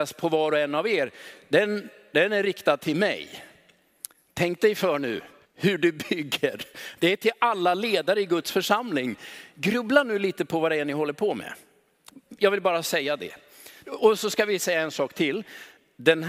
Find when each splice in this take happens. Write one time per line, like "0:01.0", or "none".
0:05.4
0:13.8